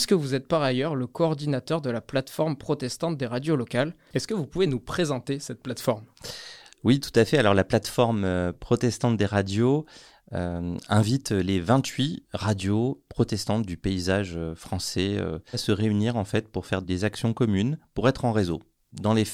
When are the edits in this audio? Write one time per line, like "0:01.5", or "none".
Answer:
0:13.1
0:15.5
0:16.8